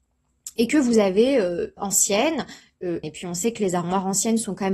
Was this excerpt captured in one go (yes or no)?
no